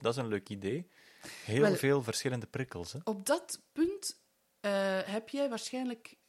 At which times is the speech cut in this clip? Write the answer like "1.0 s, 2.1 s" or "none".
none